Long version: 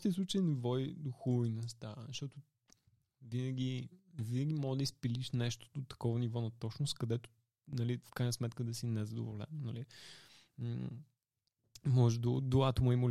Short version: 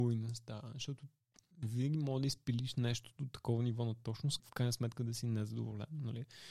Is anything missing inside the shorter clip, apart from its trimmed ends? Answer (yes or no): yes